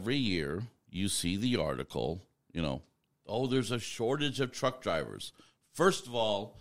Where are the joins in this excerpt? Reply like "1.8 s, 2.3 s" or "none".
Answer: none